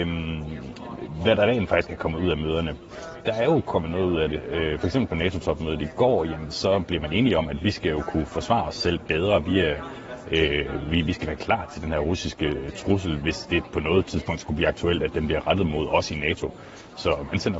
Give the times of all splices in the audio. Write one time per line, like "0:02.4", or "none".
0:03.2